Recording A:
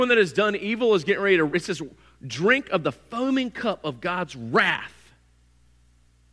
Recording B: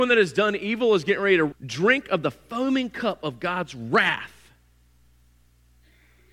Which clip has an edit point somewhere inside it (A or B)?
B